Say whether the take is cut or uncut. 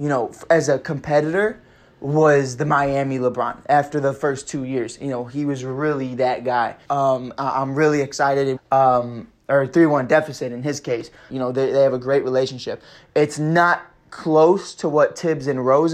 cut